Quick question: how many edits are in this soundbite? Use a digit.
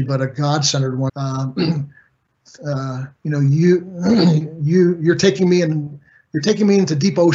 2